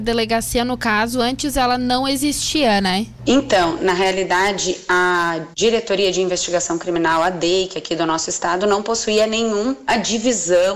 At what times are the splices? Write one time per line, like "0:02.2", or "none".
0:03.2